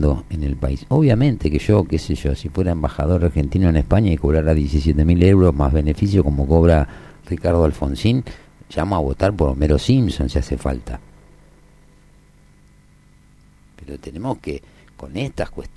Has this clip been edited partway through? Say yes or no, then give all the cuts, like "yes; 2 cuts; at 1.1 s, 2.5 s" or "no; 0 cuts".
no; 0 cuts